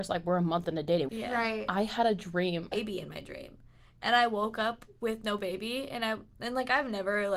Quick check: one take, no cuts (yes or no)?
no